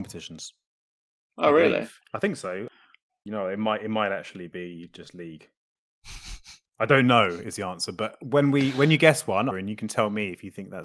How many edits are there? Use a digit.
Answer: 1